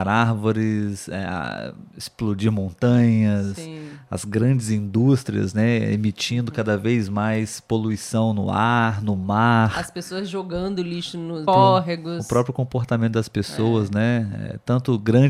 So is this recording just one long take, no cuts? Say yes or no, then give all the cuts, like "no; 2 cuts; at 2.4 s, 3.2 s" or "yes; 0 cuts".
no; 1 cut; at 11.5 s